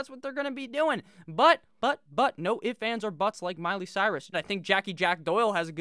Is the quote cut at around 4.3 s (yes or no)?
yes